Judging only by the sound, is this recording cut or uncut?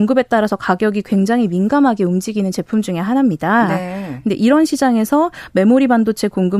uncut